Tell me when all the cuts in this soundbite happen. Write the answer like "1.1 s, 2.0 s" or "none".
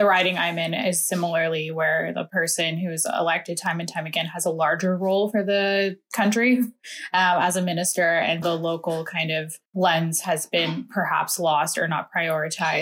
8.4 s, 9.7 s